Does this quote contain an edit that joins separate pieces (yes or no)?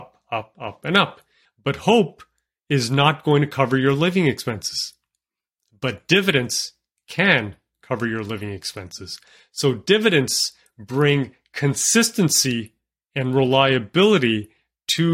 yes